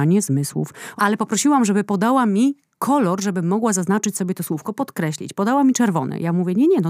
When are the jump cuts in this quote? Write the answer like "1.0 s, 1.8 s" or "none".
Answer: 1.0 s